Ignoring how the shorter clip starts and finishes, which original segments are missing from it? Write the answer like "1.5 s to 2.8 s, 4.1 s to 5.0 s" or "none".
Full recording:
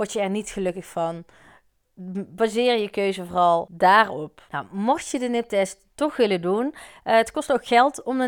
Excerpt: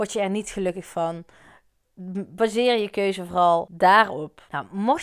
none